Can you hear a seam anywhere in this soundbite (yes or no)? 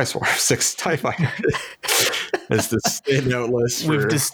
no